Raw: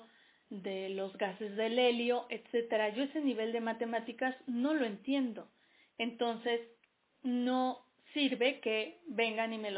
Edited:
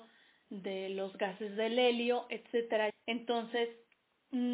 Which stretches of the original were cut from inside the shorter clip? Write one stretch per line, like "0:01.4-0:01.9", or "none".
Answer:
0:02.9-0:05.8